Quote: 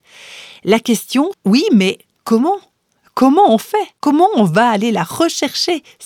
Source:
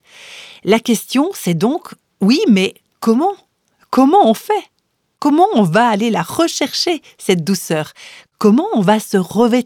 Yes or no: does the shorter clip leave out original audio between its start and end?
yes